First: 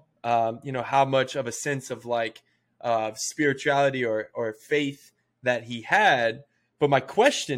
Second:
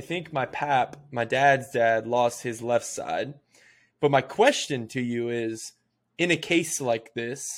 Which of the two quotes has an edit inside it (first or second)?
second